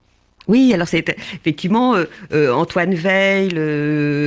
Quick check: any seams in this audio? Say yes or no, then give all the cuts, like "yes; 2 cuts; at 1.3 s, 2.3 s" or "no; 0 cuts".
no; 0 cuts